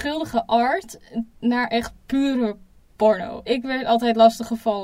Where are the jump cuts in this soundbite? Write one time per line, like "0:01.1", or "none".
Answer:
0:01.4
0:03.5